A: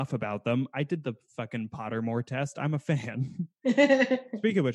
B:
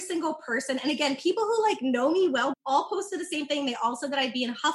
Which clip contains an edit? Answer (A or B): B